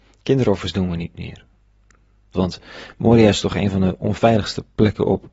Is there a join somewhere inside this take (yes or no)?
yes